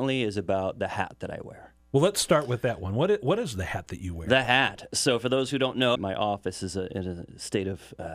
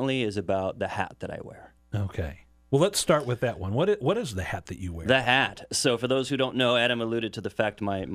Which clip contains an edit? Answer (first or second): first